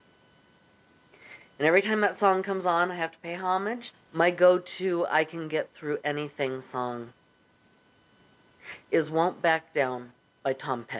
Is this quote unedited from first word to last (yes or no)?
no